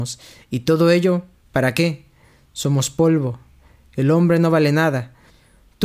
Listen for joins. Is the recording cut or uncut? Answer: uncut